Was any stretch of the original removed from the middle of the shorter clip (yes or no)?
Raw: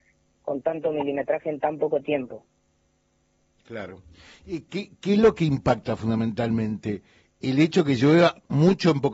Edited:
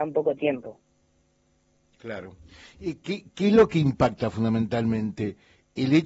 no